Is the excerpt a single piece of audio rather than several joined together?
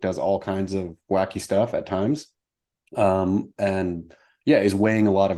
yes; 0 cuts

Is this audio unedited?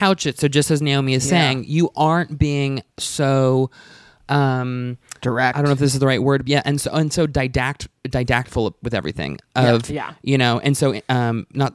yes; 0 cuts

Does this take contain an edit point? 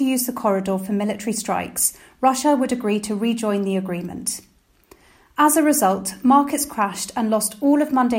no; 0 cuts

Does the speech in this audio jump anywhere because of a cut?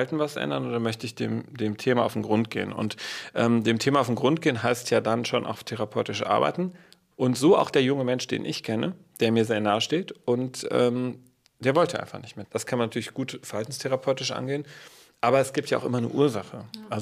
yes; 2 cuts; at 7.1 s, 12.4 s

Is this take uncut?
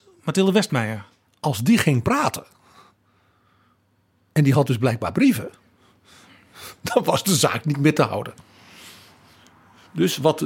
yes; 0 cuts

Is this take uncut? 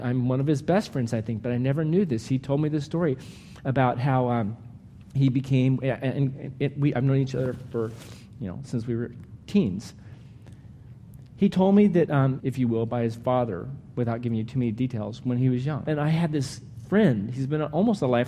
no; 2 cuts; at 12.4 s, 15.8 s

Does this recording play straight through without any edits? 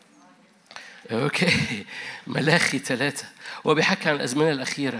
no; 1 cut; at 1.0 s

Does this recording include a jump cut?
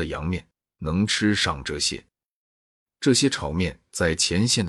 no; 0 cuts

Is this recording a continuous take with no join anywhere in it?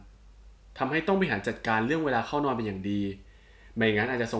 yes; 0 cuts

